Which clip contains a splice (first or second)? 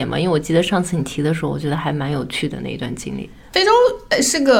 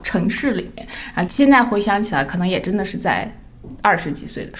second